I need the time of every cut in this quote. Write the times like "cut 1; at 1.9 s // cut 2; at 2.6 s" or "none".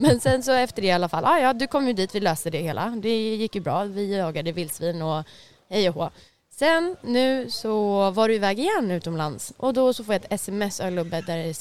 none